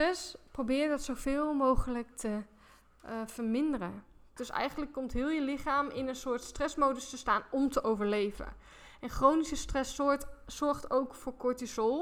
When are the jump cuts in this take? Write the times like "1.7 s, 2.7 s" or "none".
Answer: 4.4 s